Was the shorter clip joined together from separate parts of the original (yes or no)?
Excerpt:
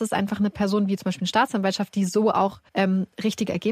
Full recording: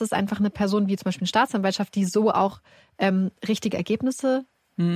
yes